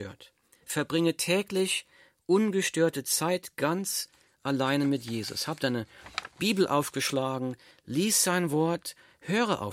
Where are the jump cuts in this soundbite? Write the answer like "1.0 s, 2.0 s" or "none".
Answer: 7.7 s